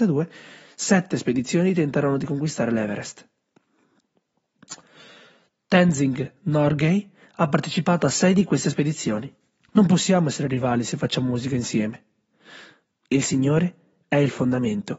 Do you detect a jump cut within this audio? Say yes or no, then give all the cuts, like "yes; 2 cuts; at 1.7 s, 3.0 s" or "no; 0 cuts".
yes; 2 cuts; at 9.7 s, 12.9 s